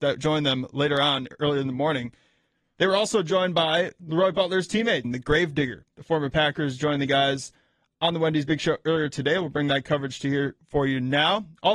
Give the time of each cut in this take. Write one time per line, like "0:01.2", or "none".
0:05.0